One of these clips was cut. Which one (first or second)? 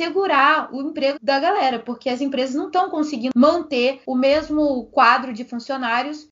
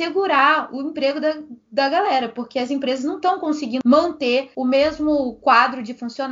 first